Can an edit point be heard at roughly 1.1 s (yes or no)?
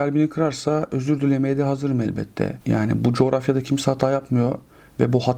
no